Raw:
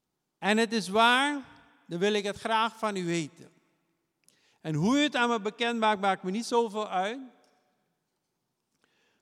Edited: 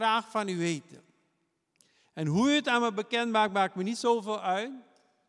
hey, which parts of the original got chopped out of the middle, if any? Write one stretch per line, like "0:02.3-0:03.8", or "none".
none